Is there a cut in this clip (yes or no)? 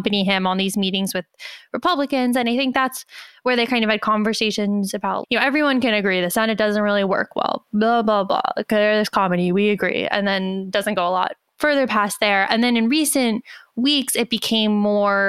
yes